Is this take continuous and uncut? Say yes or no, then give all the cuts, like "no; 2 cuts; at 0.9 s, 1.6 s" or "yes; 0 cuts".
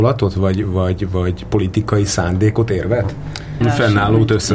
no; 1 cut; at 3.6 s